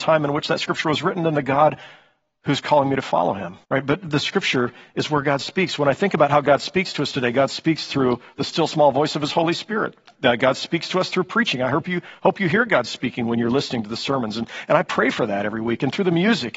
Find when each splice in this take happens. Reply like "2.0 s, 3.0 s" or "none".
3.6 s